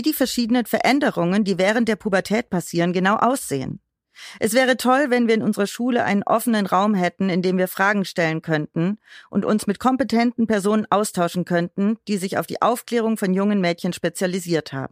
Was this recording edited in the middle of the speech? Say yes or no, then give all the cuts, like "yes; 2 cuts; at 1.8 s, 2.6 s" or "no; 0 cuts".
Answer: no; 0 cuts